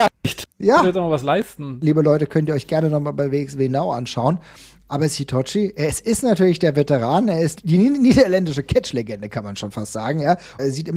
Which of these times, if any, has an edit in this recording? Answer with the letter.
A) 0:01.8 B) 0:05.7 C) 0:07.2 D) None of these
A